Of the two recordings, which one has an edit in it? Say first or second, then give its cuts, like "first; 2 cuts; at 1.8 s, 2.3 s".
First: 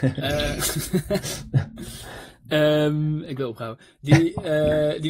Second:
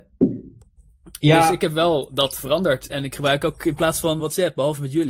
second; 1 cut; at 4.2 s